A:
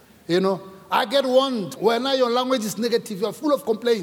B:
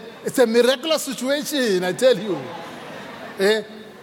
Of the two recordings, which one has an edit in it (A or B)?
A